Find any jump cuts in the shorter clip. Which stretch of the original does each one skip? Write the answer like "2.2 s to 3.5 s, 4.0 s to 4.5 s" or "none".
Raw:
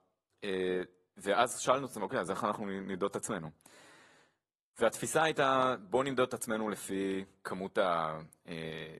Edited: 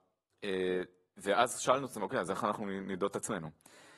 none